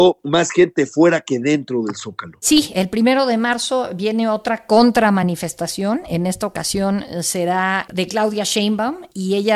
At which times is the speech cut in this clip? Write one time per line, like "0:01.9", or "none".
none